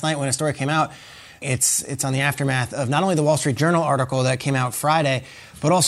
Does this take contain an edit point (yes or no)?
yes